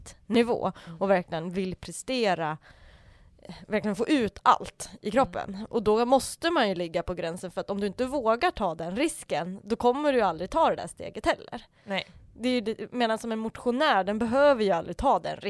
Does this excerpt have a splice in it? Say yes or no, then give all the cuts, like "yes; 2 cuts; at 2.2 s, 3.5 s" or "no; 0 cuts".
no; 0 cuts